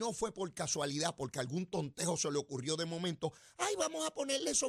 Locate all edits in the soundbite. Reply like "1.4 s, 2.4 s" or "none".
none